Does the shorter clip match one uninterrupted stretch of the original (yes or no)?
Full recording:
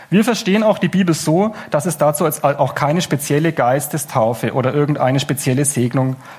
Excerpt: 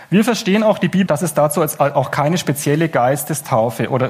no